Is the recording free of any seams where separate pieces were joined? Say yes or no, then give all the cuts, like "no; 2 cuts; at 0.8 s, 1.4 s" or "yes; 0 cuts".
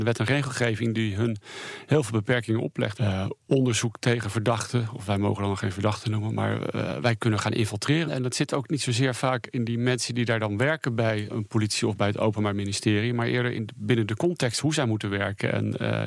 no; 3 cuts; at 2.9 s, 8.0 s, 11.3 s